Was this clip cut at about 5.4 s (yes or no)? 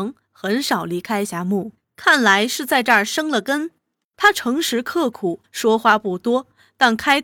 yes